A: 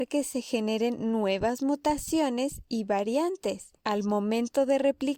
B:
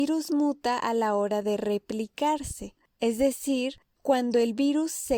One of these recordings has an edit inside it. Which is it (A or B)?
A